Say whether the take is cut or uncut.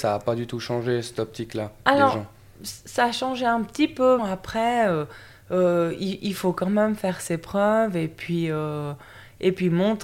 cut